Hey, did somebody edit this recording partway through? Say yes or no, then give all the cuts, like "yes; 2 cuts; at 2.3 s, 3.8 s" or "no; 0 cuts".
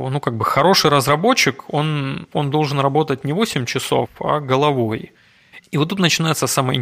yes; 1 cut; at 5.6 s